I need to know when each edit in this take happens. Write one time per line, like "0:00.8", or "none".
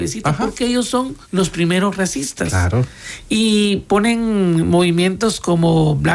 0:01.2